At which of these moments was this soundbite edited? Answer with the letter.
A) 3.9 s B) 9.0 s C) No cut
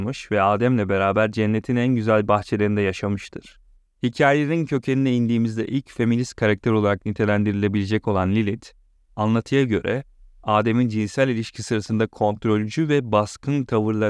A